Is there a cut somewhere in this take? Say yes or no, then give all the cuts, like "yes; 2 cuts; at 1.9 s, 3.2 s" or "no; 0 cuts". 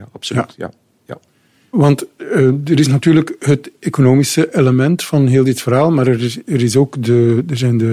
no; 0 cuts